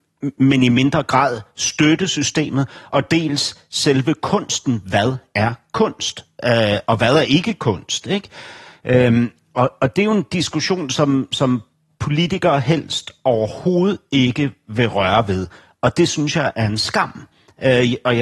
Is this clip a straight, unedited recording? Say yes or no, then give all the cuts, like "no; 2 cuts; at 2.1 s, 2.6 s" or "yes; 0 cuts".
yes; 0 cuts